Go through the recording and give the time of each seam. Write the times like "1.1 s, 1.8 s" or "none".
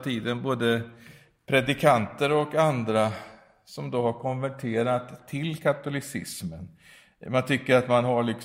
none